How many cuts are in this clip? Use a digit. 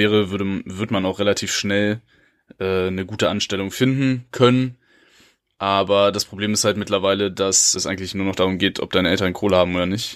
1